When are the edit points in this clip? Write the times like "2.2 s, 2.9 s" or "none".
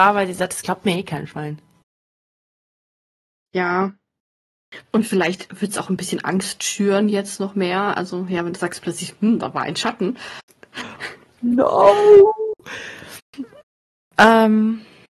10.5 s